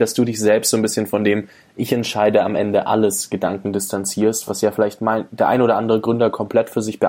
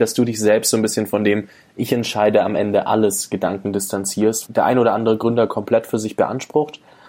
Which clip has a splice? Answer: second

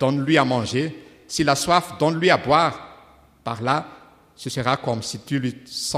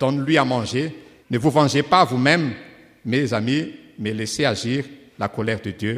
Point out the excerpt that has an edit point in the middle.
second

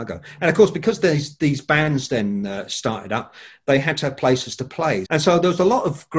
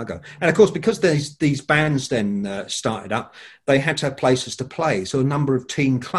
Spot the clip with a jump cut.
first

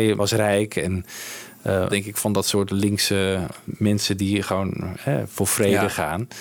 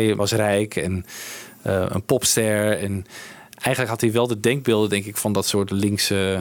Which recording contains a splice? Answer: first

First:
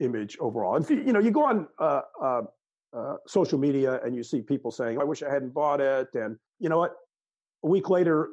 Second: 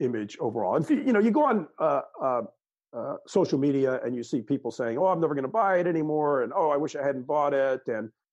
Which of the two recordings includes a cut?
first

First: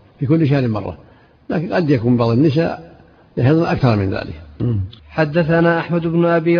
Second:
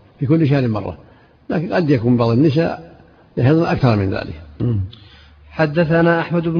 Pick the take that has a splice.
first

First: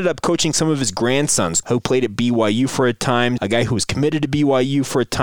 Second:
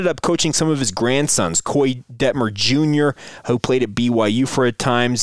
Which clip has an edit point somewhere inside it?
first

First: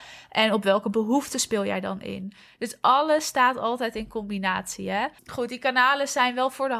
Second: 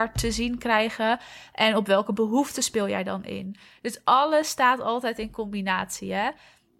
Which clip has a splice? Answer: first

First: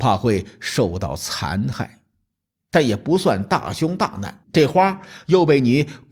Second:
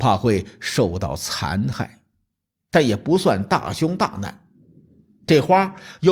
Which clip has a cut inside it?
first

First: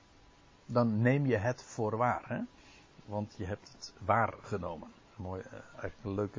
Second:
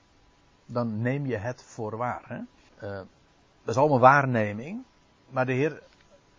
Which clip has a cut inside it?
second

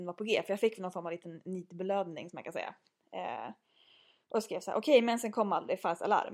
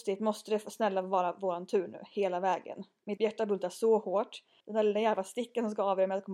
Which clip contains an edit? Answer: second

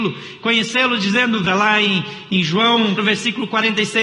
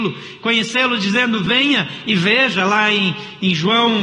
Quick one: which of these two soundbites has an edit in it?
first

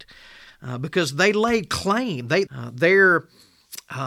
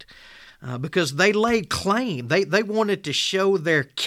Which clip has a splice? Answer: first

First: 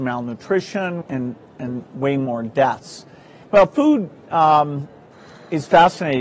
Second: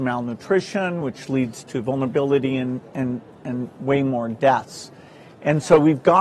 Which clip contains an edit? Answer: first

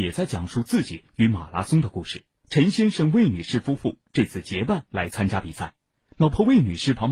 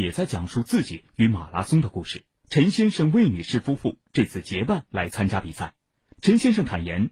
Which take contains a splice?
second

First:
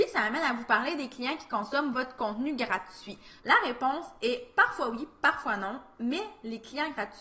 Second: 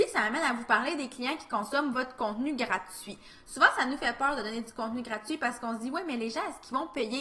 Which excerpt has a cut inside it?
first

